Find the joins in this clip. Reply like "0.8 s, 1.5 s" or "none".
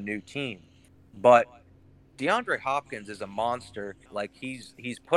4.1 s